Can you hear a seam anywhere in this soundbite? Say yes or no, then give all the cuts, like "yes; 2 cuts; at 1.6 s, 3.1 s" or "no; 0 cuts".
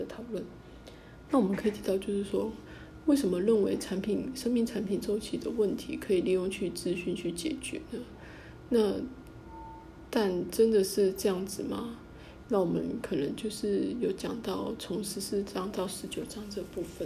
yes; 2 cuts; at 1.3 s, 12.4 s